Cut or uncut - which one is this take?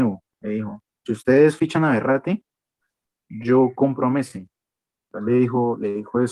uncut